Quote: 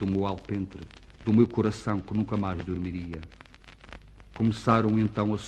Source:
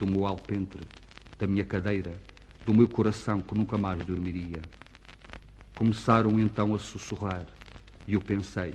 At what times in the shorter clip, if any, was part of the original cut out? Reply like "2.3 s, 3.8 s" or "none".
1.1 s